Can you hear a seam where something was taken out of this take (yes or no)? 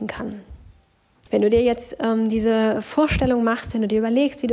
yes